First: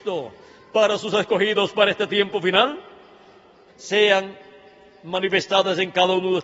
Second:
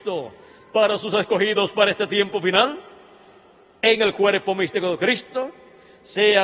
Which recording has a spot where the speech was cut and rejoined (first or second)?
first